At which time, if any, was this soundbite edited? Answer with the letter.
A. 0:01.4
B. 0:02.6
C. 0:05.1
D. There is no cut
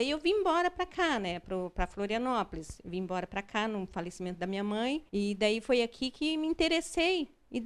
C